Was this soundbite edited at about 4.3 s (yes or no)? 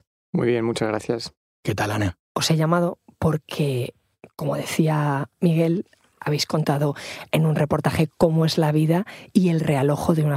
no